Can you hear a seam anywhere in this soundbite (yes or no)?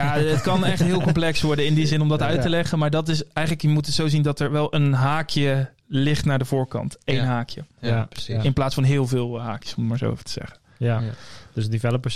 no